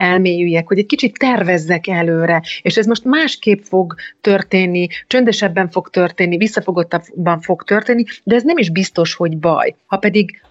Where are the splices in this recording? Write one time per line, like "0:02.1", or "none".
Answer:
none